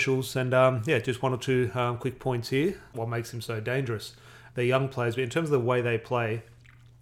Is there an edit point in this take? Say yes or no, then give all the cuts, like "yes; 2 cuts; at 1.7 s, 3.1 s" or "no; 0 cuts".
yes; 2 cuts; at 2.9 s, 4.5 s